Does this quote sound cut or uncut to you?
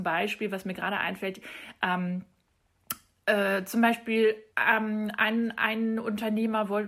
cut